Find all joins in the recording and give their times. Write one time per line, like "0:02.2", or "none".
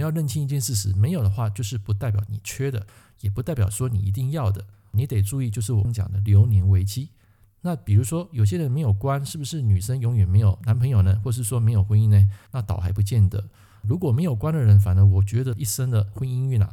0:05.8